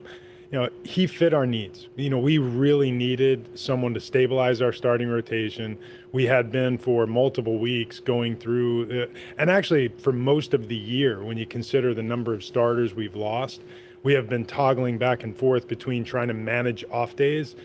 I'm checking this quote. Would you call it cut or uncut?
uncut